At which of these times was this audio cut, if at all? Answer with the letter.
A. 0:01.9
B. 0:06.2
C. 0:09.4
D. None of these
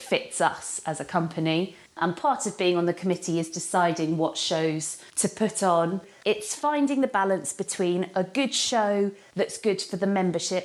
A